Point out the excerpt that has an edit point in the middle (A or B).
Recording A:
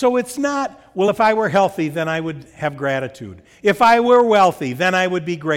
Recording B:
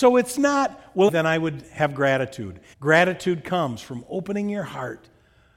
B